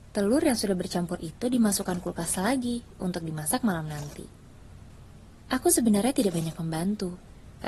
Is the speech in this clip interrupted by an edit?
no; 0 cuts

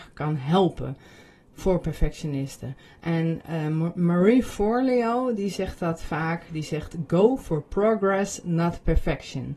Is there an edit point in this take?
no; 0 cuts

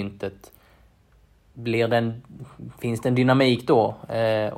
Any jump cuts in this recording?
no; 0 cuts

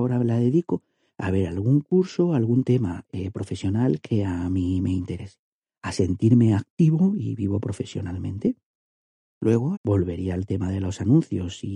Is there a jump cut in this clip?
yes; 1 cut; at 9.7 s

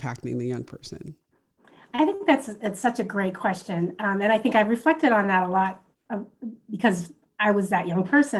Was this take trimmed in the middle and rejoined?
no; 0 cuts

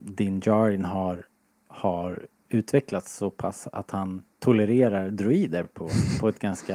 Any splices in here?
no; 0 cuts

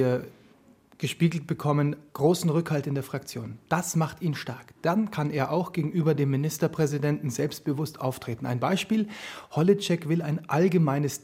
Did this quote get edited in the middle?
no; 0 cuts

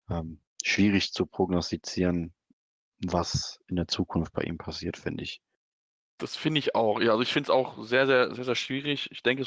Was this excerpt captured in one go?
yes; 0 cuts

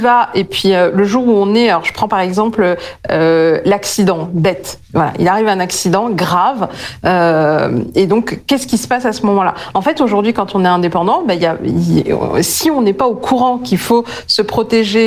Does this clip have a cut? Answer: no; 0 cuts

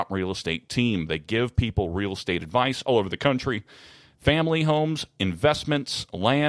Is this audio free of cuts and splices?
yes; 0 cuts

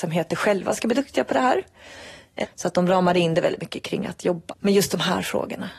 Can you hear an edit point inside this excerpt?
yes; 2 cuts; at 2.4 s, 4.5 s

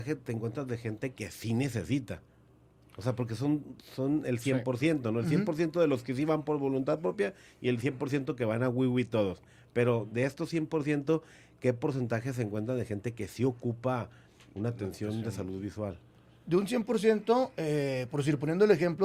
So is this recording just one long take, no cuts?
yes; 0 cuts

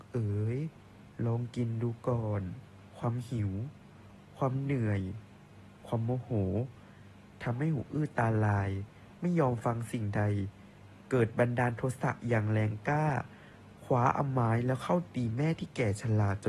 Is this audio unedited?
no; 1 cut; at 2.9 s

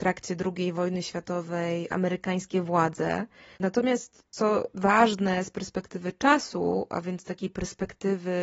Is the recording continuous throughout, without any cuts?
no; 1 cut; at 3.6 s

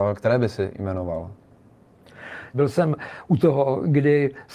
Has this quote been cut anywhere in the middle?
yes; 1 cut; at 2.5 s

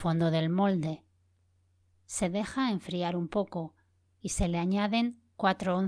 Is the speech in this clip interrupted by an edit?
yes; 1 cut; at 1.9 s

